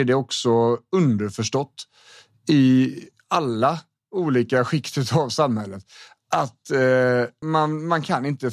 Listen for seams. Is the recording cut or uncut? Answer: cut